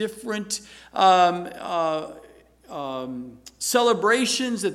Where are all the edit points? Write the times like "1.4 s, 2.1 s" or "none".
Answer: none

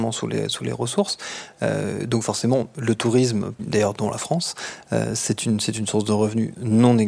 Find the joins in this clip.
3.6 s

